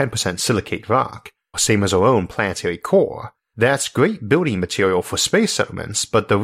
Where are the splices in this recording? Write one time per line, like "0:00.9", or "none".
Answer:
0:01.5